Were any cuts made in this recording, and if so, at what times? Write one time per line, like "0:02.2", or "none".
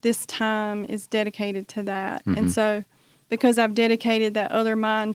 none